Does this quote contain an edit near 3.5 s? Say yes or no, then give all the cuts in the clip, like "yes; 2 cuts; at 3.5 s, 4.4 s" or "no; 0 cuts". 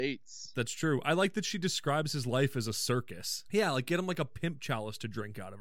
yes; 1 cut; at 3.5 s